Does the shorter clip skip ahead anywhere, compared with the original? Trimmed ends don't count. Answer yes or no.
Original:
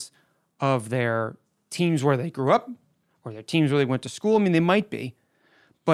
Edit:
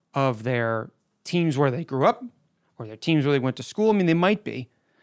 no